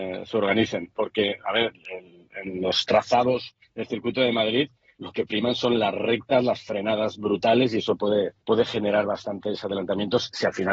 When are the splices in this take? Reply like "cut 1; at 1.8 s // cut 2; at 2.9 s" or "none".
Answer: cut 1; at 3.6 s // cut 2; at 8.4 s